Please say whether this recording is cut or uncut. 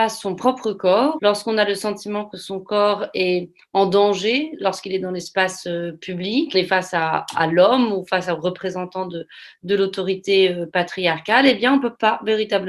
cut